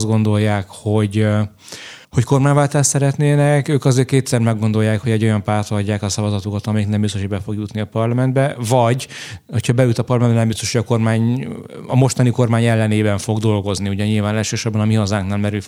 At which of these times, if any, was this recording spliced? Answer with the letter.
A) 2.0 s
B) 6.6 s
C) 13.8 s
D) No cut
A